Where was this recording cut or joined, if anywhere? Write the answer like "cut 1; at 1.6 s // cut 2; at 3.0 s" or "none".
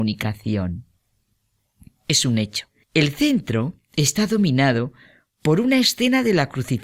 cut 1; at 2.8 s